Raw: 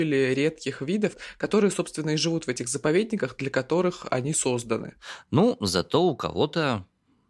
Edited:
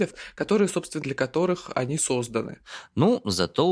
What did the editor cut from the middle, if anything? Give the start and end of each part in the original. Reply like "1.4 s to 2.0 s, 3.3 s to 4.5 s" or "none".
2.0 s to 3.4 s